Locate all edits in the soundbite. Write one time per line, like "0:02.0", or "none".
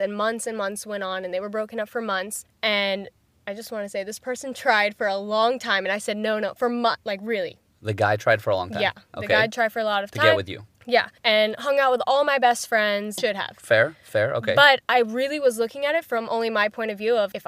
0:11.2
0:13.2